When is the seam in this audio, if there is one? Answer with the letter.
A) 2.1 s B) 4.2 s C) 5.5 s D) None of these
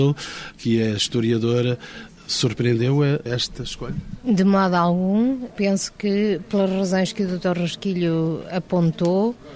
D